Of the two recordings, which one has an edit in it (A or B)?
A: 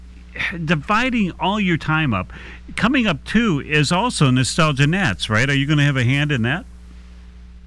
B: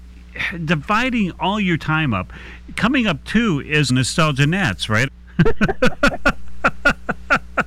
B